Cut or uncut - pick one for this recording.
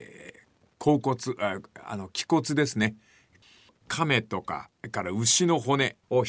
uncut